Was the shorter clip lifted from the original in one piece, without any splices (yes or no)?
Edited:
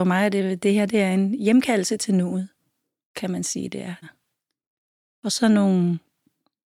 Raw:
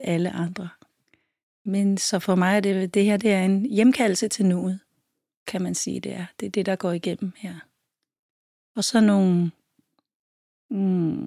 no